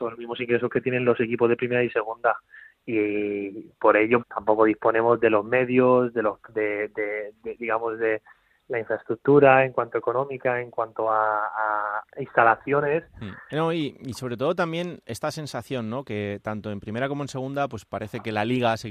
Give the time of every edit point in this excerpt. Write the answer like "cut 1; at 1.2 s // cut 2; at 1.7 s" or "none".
cut 1; at 4.2 s // cut 2; at 12.0 s // cut 3; at 13.5 s